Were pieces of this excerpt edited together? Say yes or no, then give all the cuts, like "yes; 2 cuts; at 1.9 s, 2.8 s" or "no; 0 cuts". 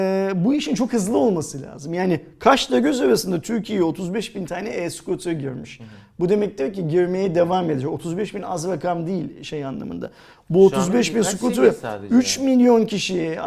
no; 0 cuts